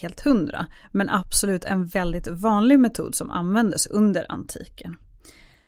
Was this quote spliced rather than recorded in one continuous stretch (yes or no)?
no